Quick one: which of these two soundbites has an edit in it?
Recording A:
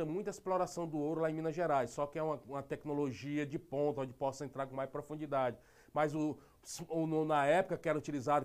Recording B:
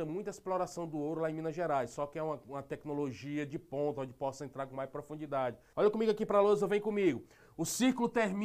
B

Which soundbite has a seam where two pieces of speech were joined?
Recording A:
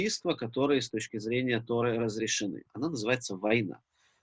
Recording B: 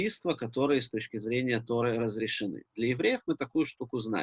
A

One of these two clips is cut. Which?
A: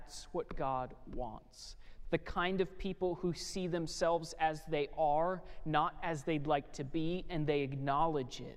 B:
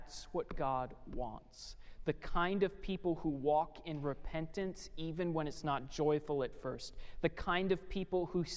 A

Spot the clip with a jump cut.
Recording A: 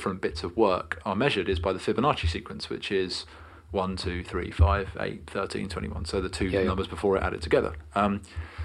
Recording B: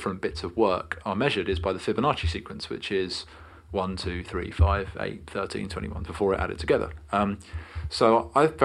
B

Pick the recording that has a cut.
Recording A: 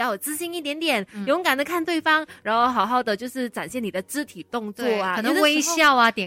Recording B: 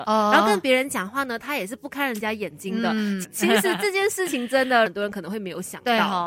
B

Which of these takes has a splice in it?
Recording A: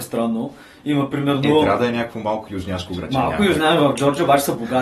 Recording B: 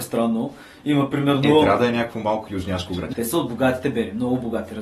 B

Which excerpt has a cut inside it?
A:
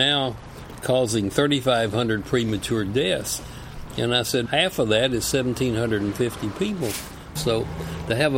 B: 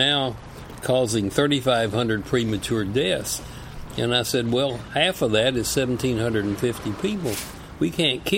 A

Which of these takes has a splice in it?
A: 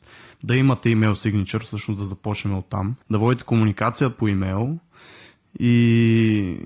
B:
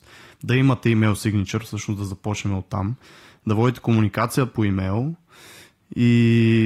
A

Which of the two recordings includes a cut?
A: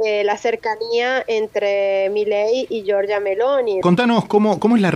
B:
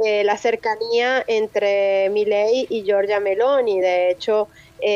A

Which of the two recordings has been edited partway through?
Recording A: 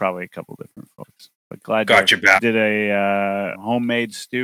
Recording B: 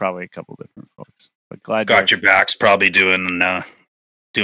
A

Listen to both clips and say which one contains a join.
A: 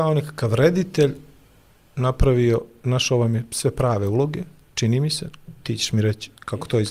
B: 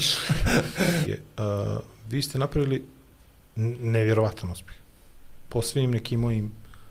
B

